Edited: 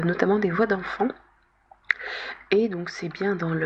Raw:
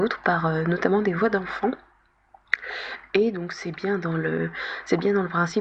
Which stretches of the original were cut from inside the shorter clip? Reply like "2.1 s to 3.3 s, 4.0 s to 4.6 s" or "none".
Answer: none

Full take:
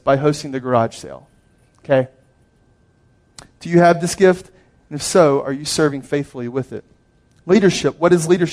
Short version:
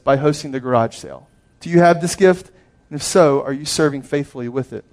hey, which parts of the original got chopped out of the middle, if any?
1.5 s to 3.5 s

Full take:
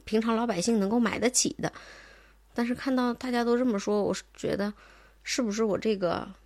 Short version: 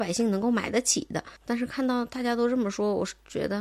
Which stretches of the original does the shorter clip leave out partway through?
1.8 s to 2.4 s

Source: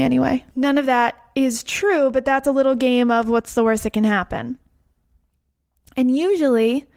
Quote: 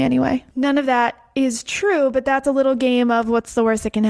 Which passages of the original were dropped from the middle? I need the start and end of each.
none

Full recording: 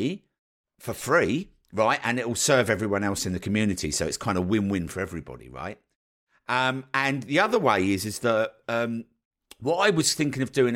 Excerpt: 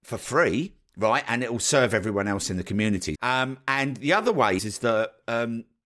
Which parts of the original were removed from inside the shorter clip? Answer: 3.9 s to 6.4 s, 7.8 s to 8.0 s

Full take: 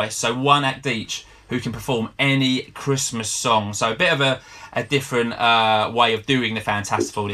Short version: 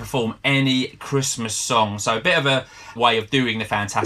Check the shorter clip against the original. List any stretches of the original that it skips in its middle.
4.7 s to 5.9 s

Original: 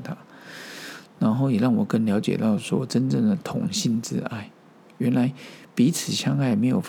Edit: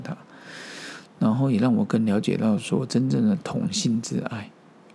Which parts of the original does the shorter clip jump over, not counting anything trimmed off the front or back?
none

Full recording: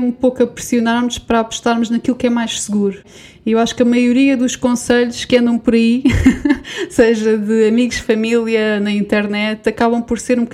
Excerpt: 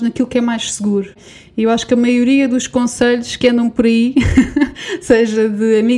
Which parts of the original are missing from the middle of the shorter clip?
none

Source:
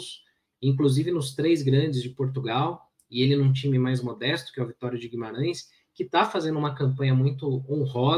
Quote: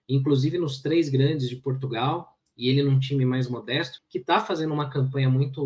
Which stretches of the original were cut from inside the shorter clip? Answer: 4.5 s to 5.8 s

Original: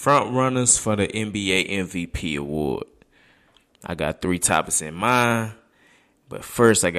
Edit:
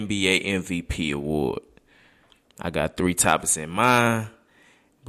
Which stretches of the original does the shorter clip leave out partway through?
none

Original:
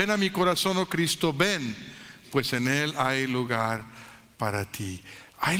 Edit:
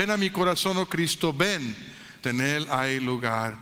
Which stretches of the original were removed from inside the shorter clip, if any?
2.2 s to 2.5 s

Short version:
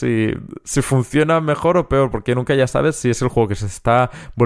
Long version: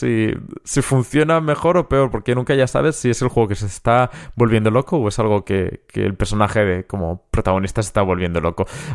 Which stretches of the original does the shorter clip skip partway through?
none

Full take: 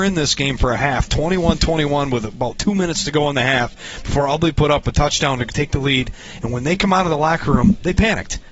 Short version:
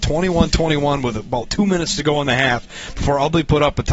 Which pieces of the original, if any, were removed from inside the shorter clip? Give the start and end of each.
none

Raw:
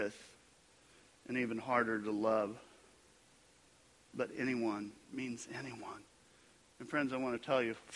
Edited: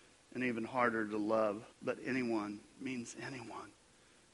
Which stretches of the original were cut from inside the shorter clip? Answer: 2.7 s to 4.0 s

